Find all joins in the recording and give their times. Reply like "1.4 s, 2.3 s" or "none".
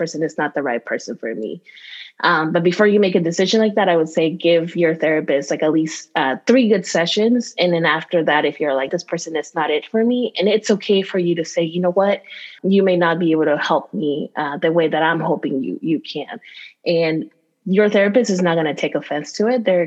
8.9 s, 12.6 s